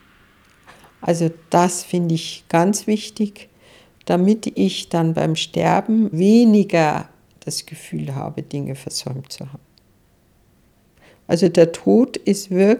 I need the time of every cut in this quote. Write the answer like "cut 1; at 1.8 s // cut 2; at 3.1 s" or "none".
cut 1; at 6.1 s